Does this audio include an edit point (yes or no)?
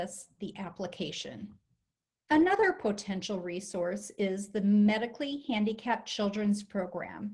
yes